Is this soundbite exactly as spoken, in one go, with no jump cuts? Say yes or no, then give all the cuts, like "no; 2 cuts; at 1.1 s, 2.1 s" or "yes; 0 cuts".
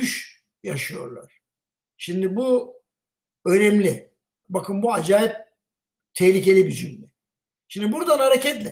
no; 1 cut; at 4.4 s